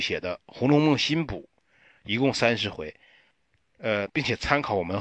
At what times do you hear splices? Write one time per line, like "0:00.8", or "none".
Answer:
0:04.1